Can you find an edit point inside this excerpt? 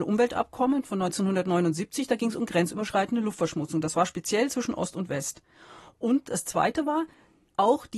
no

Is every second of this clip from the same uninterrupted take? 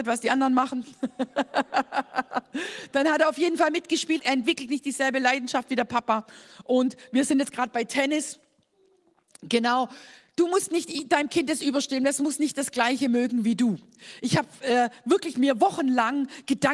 no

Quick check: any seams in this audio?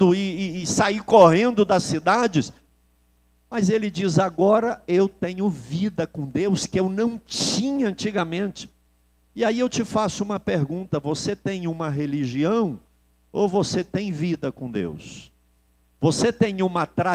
no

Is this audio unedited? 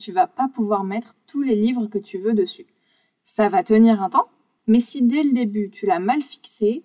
no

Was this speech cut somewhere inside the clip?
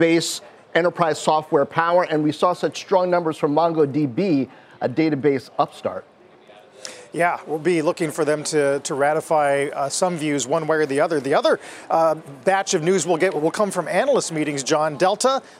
no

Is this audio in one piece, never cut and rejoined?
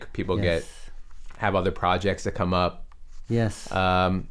no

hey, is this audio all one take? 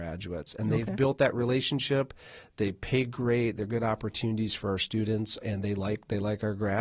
no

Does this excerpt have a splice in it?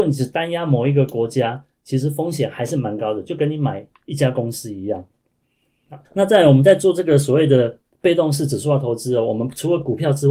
yes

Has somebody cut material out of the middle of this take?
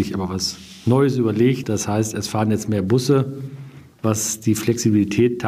yes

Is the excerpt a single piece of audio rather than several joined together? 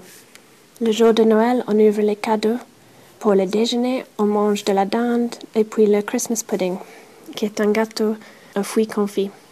yes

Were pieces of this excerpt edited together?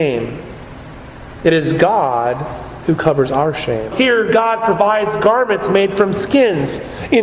yes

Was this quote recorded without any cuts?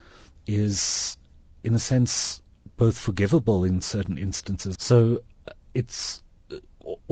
no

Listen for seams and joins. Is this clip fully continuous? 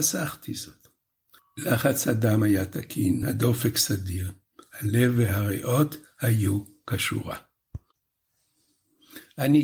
yes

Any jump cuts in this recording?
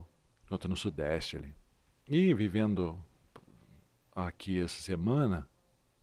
yes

